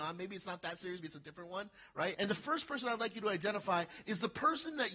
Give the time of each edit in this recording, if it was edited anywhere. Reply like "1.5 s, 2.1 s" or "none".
1.0 s, 2.1 s